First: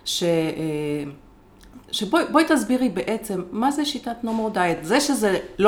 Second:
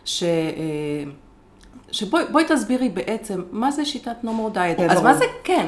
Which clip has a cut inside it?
second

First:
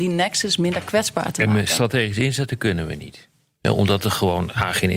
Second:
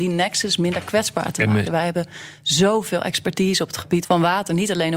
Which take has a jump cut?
second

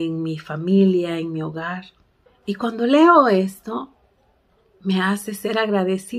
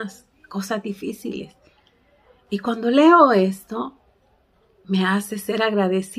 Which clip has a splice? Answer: first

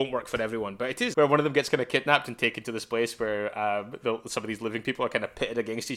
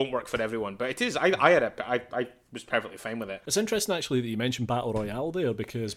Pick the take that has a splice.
first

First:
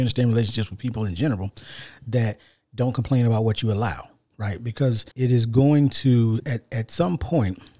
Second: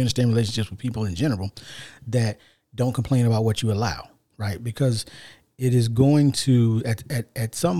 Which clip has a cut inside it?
first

